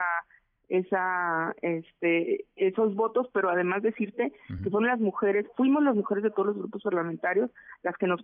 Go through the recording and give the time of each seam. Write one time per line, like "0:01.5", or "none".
none